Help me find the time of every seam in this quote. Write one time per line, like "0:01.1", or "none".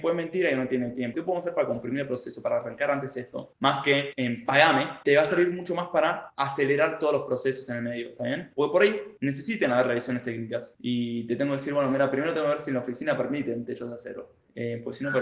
0:01.1
0:09.2
0:10.7